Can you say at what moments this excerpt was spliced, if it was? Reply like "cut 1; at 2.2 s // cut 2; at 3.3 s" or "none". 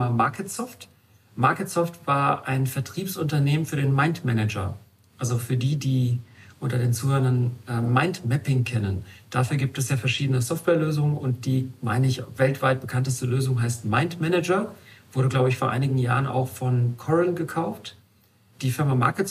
none